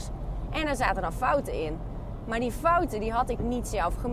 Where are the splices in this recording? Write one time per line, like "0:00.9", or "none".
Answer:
none